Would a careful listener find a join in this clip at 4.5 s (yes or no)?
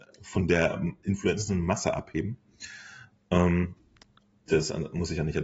yes